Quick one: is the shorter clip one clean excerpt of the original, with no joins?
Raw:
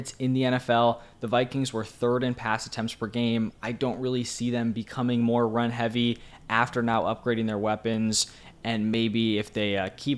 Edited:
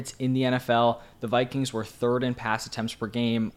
yes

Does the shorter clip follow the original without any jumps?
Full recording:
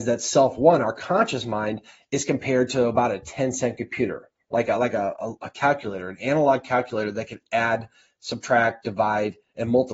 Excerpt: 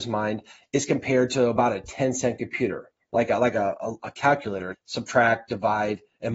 no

